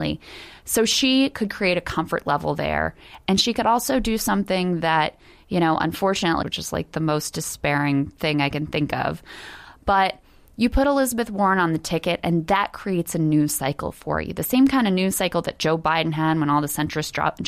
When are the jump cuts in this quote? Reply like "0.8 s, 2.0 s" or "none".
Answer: 6.4 s